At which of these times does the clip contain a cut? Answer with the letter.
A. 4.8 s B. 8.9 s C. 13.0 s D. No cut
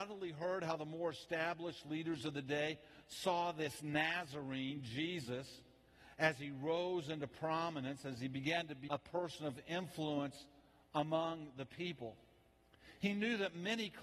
B